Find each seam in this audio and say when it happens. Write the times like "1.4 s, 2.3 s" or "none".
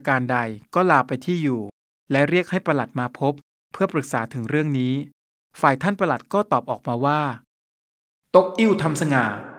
none